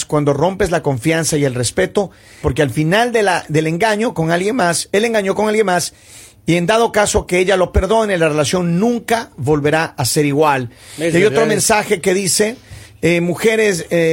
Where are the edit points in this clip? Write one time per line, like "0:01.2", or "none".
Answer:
0:02.4

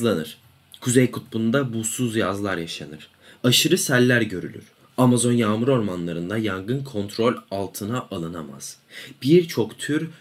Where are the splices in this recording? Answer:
0:03.4

